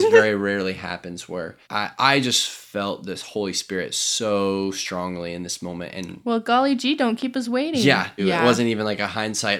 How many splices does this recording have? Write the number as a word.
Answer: two